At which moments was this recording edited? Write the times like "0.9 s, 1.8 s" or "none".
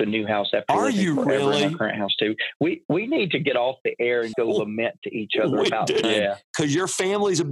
4.3 s, 6.0 s